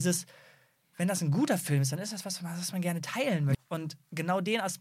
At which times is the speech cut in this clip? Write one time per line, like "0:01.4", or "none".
0:03.5